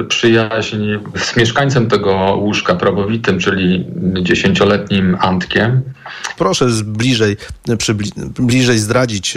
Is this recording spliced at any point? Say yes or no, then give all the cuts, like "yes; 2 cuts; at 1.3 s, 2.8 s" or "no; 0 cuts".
yes; 2 cuts; at 1.1 s, 6.4 s